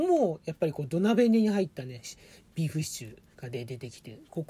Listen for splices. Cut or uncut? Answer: cut